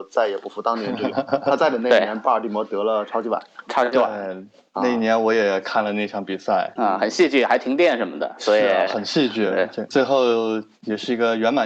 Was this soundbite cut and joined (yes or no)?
no